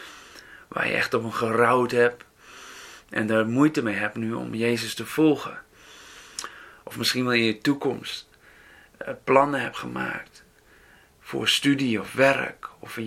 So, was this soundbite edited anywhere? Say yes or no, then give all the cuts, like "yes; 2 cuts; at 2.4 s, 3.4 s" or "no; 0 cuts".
no; 0 cuts